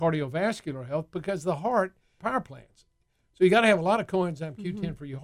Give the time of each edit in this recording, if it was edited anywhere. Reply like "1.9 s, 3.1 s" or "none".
2.2 s